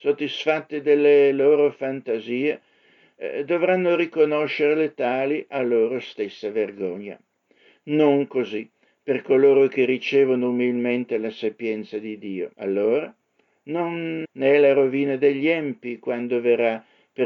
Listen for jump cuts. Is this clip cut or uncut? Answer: cut